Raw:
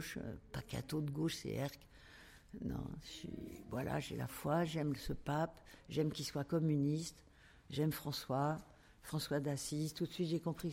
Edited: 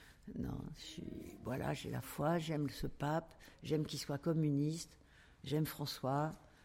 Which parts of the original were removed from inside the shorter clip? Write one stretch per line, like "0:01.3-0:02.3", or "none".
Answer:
none